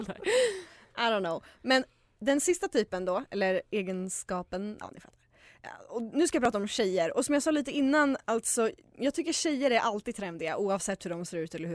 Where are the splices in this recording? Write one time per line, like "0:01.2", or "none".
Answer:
none